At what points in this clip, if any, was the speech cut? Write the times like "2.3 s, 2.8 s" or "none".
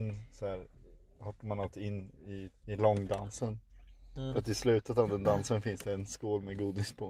2.6 s